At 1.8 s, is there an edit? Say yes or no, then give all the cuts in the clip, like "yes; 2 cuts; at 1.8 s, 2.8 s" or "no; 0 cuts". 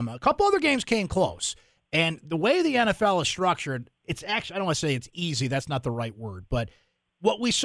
no; 0 cuts